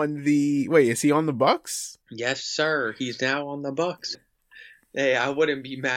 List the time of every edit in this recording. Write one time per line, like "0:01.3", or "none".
0:02.0
0:04.1